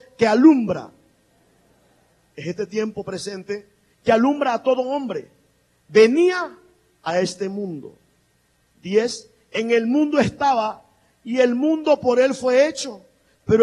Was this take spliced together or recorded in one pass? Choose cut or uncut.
uncut